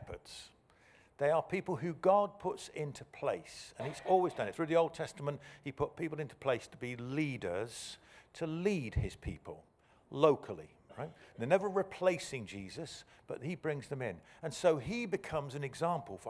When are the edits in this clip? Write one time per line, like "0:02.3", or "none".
none